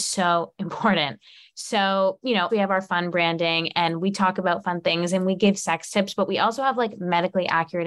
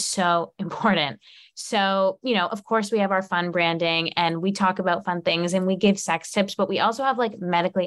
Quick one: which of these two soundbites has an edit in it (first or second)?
first